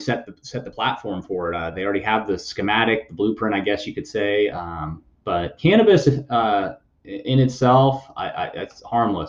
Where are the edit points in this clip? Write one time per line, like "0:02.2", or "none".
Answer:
none